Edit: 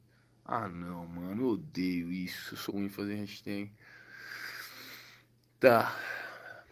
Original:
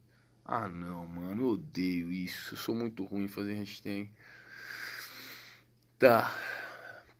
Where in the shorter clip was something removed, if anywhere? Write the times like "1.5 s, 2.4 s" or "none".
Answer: 2.7 s